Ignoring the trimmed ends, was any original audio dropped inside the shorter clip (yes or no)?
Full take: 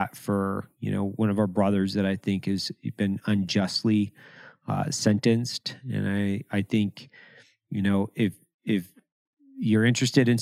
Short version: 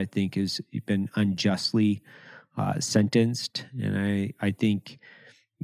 no